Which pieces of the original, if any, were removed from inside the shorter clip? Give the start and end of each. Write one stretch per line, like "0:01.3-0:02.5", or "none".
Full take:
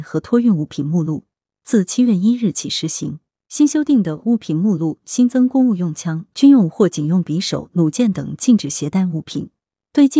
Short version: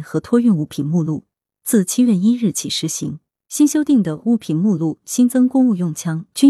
none